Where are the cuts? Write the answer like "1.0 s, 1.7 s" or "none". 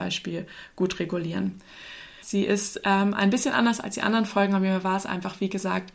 2.2 s